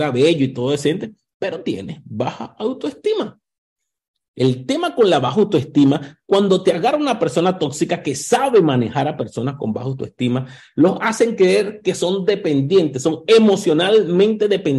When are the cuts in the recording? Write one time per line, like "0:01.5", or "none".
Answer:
none